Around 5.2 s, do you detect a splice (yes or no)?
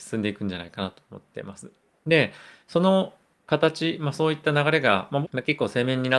yes